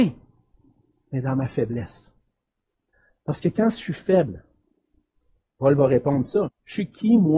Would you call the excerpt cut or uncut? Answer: cut